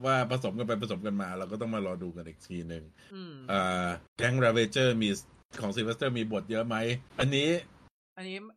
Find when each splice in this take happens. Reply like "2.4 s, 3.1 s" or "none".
4.1 s, 7.1 s

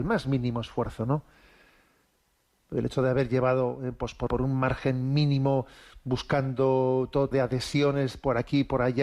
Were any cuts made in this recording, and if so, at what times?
4.3 s, 7.3 s

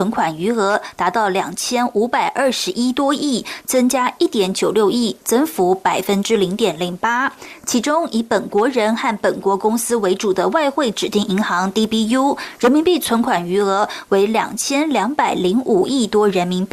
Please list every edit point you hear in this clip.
none

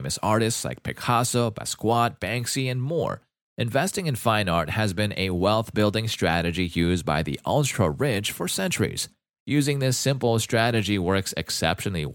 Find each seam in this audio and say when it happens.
3.5 s, 9.4 s

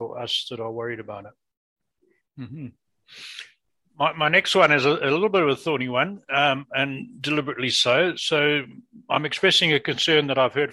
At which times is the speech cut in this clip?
2.2 s

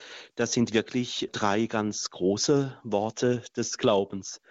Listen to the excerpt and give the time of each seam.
1.3 s

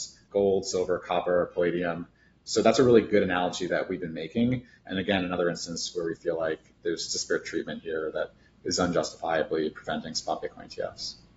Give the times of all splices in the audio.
none

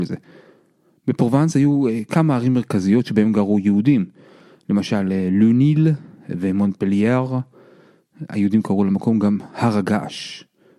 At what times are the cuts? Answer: none

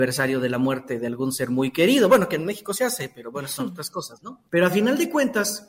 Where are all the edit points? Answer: 4.5 s

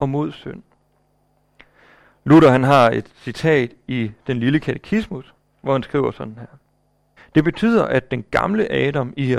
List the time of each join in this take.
7.2 s

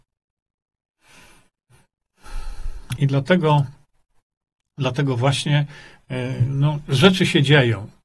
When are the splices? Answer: 3.0 s

